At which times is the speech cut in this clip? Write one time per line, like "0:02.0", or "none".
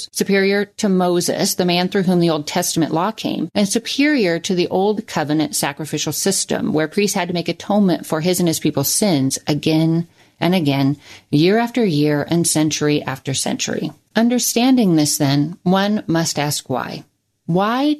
none